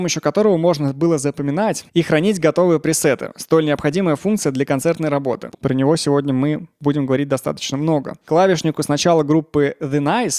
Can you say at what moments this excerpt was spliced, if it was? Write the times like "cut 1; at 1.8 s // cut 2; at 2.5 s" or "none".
cut 1; at 5.5 s